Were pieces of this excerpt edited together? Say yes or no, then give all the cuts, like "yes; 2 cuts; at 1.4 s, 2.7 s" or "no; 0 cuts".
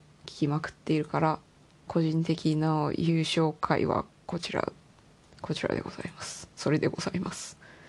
no; 0 cuts